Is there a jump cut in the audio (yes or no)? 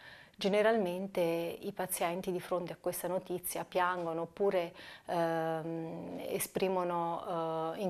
no